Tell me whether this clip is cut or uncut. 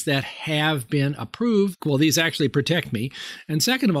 cut